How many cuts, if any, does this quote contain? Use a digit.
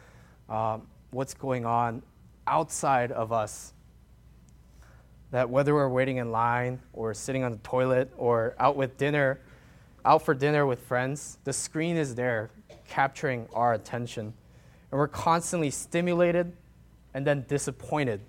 0